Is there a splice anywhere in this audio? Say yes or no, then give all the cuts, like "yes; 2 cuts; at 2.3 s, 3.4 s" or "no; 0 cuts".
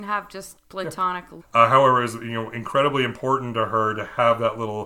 yes; 1 cut; at 1.4 s